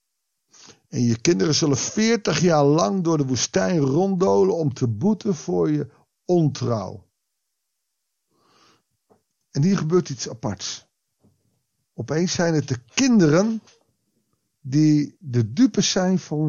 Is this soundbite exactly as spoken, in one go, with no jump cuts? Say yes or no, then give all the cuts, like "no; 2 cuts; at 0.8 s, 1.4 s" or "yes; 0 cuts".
yes; 0 cuts